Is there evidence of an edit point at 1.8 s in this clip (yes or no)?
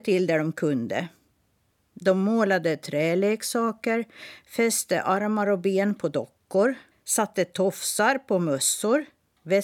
no